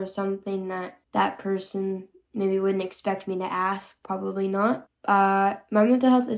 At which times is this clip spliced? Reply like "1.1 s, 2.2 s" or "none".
1.0 s, 4.9 s